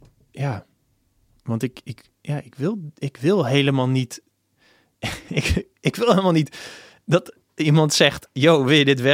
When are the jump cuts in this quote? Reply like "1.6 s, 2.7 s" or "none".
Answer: none